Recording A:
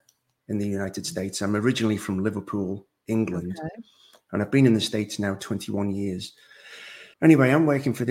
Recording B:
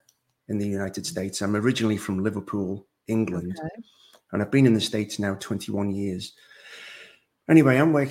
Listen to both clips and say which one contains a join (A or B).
A